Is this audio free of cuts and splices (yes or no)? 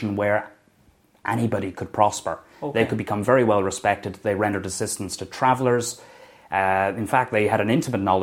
yes